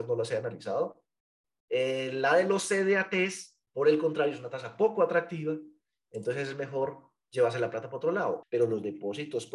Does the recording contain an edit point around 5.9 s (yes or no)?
no